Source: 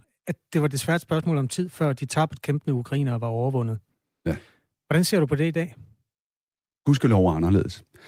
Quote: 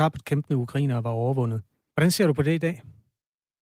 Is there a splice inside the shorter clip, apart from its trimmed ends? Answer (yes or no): yes